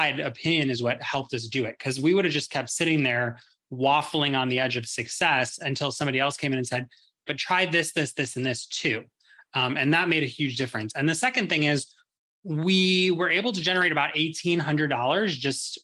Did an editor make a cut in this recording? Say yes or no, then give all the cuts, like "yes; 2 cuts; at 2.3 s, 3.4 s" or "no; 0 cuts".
yes; 1 cut; at 7.3 s